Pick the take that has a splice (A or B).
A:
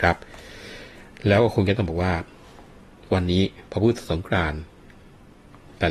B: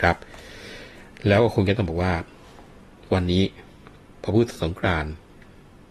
A